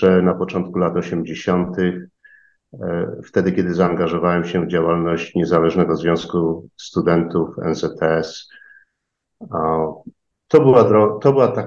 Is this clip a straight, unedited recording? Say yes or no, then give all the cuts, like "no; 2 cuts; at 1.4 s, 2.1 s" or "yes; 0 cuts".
no; 1 cut; at 10.4 s